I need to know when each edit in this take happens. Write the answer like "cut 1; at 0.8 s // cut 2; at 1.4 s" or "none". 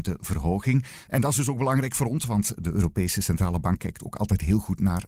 cut 1; at 1.1 s